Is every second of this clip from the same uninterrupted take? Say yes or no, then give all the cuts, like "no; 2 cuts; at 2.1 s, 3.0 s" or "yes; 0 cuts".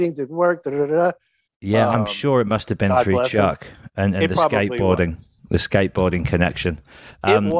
no; 1 cut; at 1.5 s